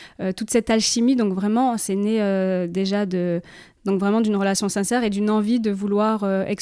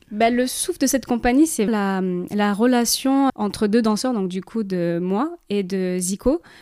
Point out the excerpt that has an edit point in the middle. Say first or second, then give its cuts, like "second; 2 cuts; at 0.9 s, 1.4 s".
second; 2 cuts; at 1.7 s, 3.3 s